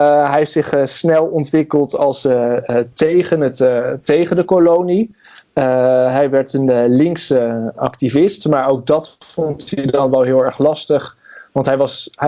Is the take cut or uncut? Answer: uncut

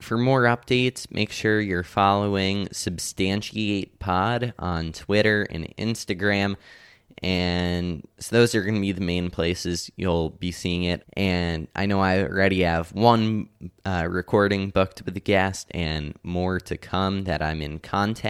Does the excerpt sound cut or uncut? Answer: cut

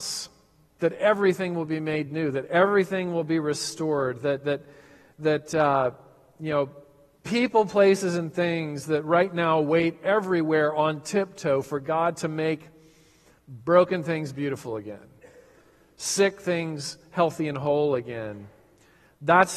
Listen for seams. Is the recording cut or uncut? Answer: uncut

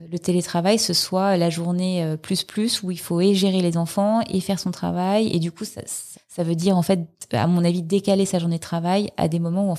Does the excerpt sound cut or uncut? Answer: cut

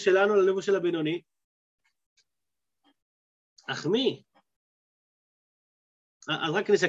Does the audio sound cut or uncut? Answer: uncut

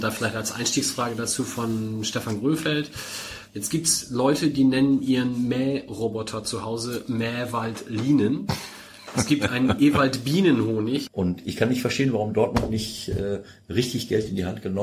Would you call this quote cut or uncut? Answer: cut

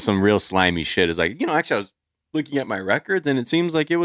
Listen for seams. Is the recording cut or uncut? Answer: uncut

